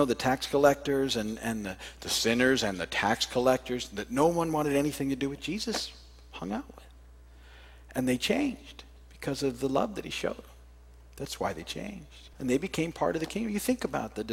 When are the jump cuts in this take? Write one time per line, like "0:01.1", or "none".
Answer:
0:12.3